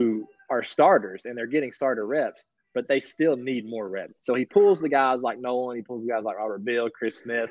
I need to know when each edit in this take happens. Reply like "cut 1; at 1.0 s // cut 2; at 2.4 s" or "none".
cut 1; at 4.1 s